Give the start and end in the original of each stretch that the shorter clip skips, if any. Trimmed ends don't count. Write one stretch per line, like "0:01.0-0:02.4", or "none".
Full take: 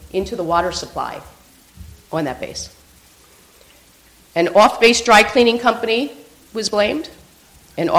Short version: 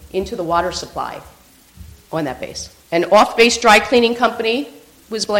0:02.8-0:04.2